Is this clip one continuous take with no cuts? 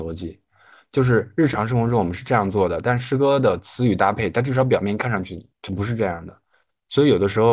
yes; 0 cuts

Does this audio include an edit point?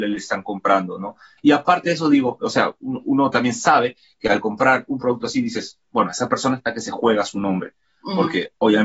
yes; 1 cut; at 1.4 s

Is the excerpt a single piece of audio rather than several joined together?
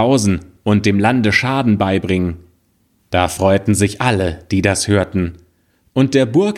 no; 1 cut; at 3.0 s

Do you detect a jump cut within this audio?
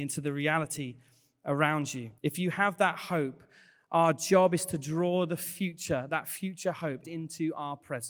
yes; 2 cuts; at 2.2 s, 7.0 s

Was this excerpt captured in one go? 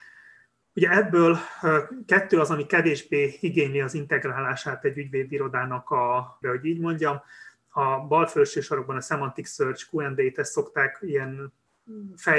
no; 1 cut; at 6.4 s

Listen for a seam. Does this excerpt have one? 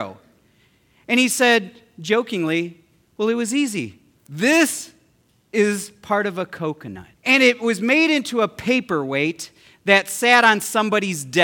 yes; 2 cuts; at 4.1 s, 7.2 s

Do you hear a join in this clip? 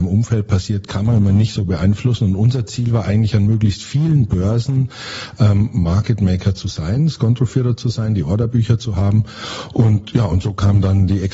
no; 0 cuts

